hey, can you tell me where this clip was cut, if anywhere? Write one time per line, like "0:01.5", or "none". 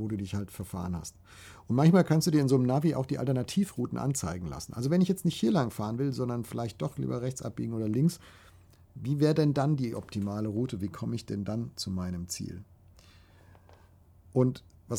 none